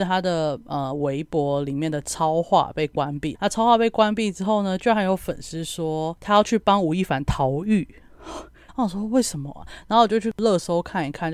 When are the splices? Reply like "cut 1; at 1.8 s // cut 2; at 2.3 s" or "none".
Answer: cut 1; at 3.3 s // cut 2; at 8.7 s

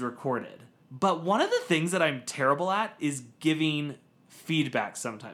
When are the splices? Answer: none

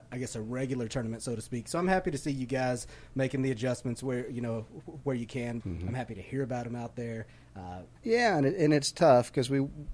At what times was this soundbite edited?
cut 1; at 5.6 s // cut 2; at 8.0 s

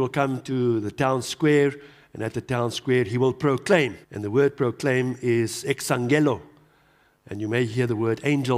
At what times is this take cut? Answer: cut 1; at 4.0 s

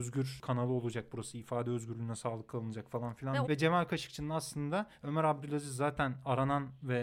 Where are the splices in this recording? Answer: cut 1; at 3.4 s

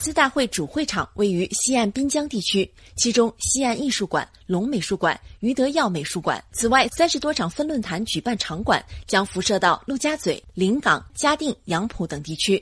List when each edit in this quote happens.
cut 1; at 6.5 s // cut 2; at 11.1 s

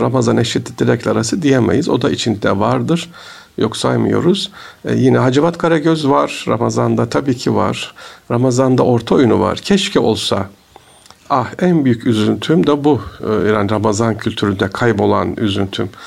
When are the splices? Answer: none

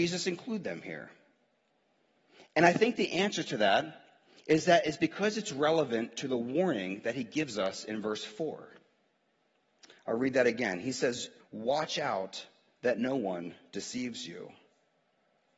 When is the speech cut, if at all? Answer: cut 1; at 11.4 s

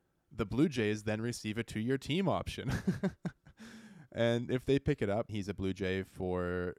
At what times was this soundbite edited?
cut 1; at 5.3 s

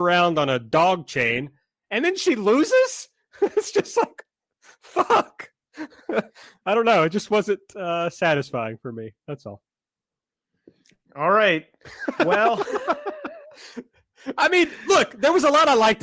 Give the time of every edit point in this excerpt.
none

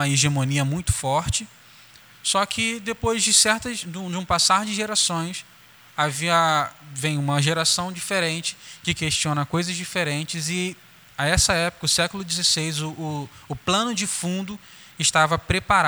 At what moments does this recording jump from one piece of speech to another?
none

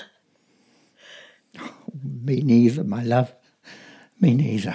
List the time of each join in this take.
cut 1; at 1.5 s

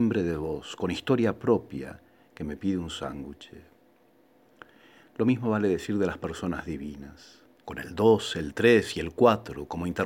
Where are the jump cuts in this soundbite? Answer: cut 1; at 7.6 s

